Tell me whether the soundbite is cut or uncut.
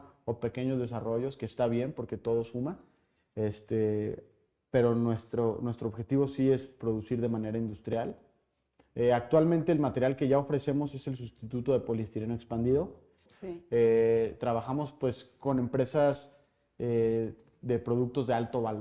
cut